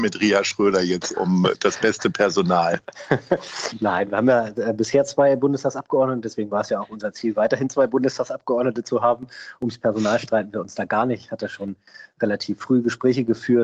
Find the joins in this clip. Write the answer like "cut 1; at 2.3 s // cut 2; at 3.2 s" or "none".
none